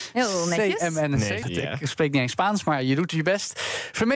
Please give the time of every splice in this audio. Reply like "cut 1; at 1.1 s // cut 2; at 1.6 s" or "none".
cut 1; at 1.4 s